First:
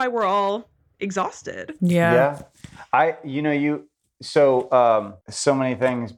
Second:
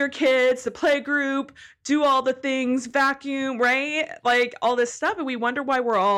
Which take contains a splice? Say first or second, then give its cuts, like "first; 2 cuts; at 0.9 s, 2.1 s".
first; 1 cut; at 5.2 s